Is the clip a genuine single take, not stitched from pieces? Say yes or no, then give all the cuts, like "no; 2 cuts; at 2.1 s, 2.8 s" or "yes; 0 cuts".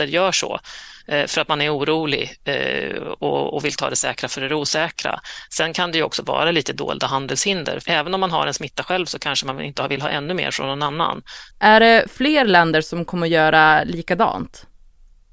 no; 2 cuts; at 7.8 s, 11.5 s